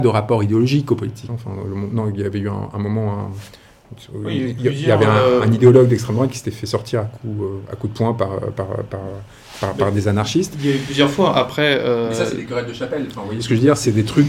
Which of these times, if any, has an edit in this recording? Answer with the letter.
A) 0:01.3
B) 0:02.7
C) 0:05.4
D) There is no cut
A